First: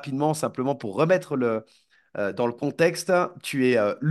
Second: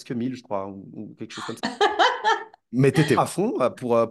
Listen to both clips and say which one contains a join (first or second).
second